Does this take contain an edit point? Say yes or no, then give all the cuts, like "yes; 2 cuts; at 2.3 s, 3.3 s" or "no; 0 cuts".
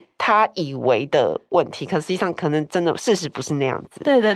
no; 0 cuts